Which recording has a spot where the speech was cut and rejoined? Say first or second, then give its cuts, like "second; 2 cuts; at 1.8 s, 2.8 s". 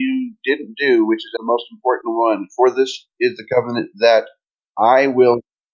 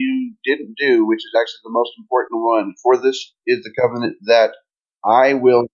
first; 1 cut; at 1.4 s